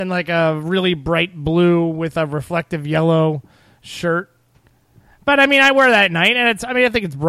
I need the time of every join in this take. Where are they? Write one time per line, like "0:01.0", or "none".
none

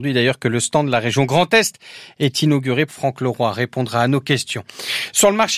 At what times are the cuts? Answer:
0:02.9

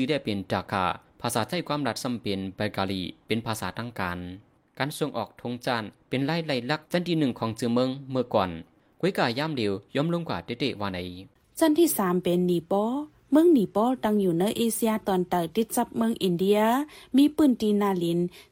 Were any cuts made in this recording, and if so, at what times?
0:06.9

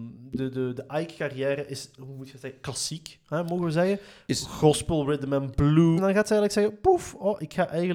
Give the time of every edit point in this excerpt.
0:06.0

